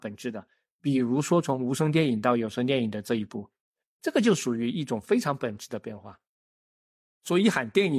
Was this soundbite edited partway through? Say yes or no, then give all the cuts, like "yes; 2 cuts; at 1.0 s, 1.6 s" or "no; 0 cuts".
no; 0 cuts